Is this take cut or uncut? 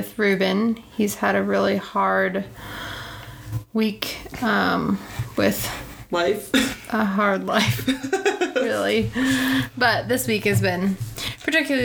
uncut